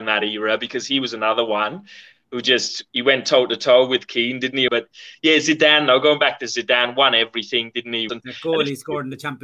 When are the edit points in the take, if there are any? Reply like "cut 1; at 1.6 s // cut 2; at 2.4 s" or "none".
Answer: cut 1; at 4.7 s // cut 2; at 8.1 s